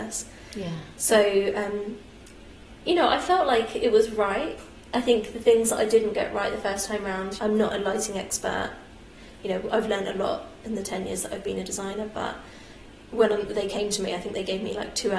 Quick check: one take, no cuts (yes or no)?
no